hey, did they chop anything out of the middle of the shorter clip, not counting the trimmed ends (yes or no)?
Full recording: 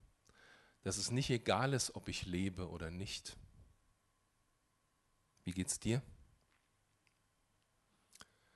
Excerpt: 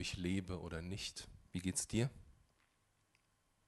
yes